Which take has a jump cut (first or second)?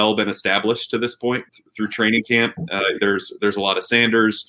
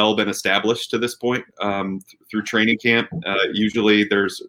first